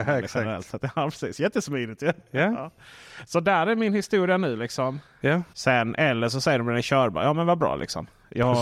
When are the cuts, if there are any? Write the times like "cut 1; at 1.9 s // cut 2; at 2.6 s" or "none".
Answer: cut 1; at 5.5 s